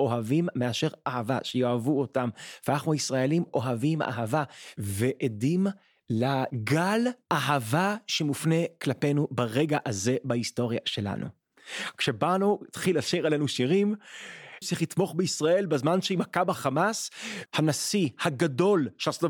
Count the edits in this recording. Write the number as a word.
two